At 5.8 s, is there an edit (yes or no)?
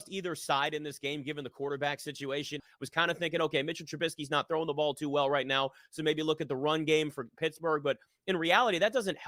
no